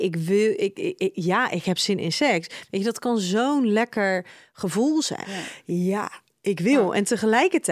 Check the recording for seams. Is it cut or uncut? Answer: cut